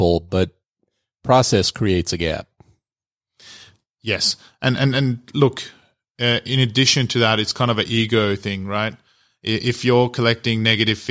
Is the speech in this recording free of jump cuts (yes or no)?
yes